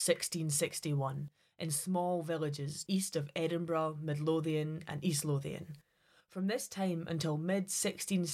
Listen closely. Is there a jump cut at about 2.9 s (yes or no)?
yes